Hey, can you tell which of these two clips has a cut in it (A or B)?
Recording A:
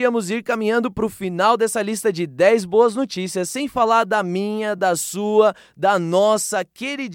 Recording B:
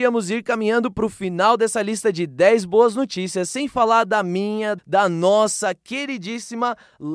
B